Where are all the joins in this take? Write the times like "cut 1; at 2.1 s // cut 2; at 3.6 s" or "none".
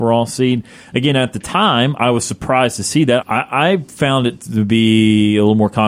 cut 1; at 3.2 s